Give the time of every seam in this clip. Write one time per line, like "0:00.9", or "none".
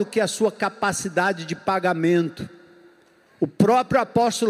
0:03.3